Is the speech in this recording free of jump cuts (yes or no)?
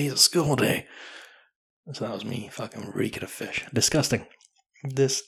yes